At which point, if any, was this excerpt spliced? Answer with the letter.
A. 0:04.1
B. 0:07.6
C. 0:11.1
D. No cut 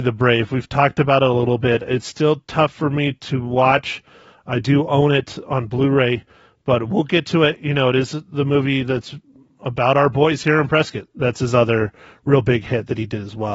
C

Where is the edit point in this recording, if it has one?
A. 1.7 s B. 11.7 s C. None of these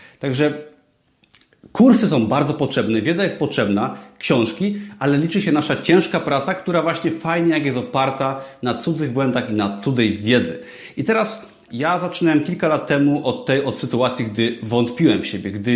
B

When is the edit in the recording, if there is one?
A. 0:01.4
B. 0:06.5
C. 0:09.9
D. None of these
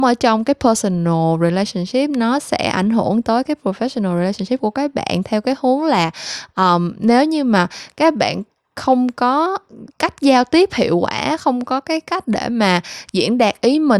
C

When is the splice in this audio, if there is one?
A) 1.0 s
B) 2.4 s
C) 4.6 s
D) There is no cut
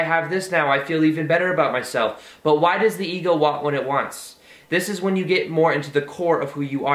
D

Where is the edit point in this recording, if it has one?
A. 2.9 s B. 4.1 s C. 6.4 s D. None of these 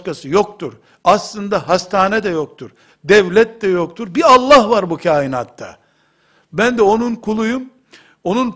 A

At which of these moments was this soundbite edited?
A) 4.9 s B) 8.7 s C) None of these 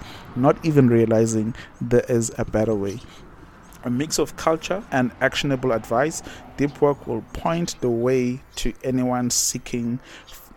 A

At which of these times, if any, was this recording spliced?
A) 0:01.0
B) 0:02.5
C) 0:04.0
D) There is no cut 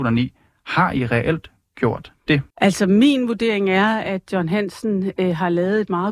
B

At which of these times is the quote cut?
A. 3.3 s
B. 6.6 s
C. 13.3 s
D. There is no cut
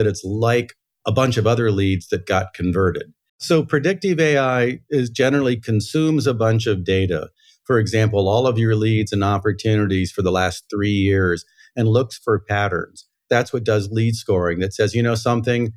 A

